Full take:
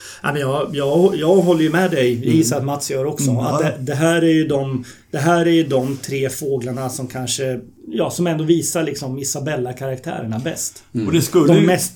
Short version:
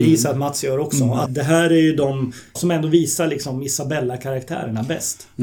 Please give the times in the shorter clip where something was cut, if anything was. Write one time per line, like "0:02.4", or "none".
0:01.3
0:02.6